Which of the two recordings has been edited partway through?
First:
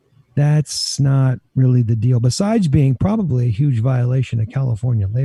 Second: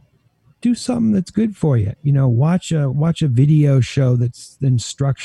second; 1 cut; at 2.0 s

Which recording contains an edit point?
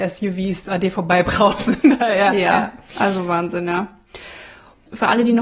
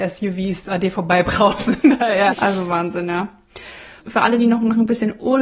second; 2 cuts; at 2.3 s, 4.0 s

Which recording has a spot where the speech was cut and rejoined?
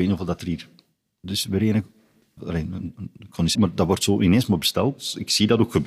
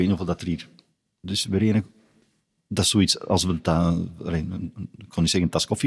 first; 2 cuts; at 2.4 s, 3.5 s

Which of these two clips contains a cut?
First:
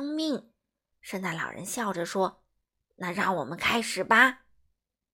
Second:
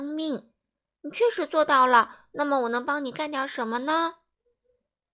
first; 1 cut; at 0.9 s

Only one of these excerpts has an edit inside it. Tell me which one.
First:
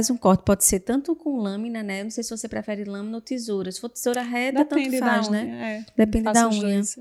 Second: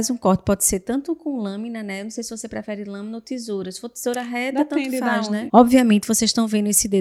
second; 1 cut; at 5.5 s

